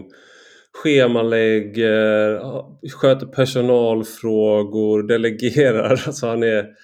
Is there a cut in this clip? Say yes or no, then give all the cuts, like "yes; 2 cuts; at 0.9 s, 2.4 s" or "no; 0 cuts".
no; 0 cuts